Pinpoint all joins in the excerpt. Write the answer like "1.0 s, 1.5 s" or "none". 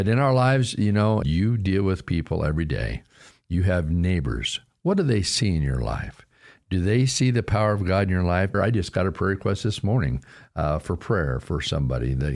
1.2 s, 8.5 s